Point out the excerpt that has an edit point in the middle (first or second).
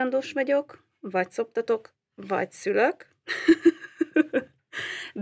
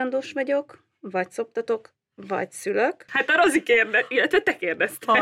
second